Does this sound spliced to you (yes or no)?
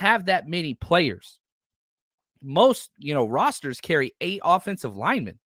no